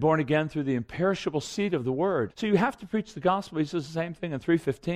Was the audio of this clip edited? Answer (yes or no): yes